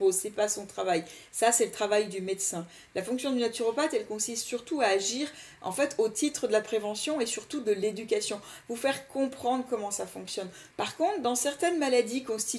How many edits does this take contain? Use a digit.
1